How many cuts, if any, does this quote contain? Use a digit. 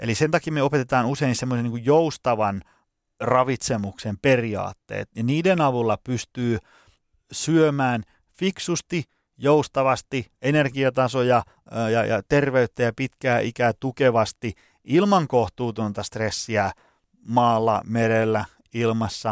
0